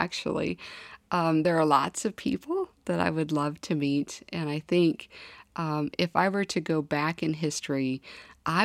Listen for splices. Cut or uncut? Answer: uncut